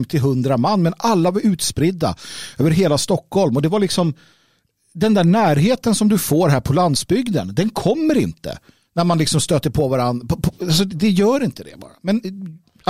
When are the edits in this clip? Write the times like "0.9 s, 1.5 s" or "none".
none